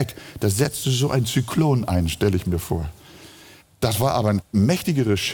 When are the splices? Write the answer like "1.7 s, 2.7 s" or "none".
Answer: none